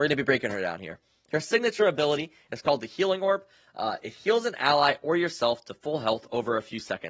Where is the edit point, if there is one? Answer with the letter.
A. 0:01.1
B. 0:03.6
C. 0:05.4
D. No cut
D